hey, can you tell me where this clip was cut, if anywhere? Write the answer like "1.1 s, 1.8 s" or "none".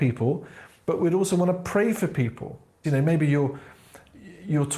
2.8 s